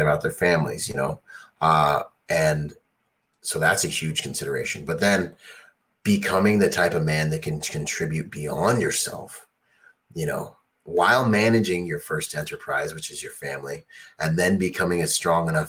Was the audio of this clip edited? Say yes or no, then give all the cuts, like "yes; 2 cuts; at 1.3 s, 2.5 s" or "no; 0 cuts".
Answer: no; 0 cuts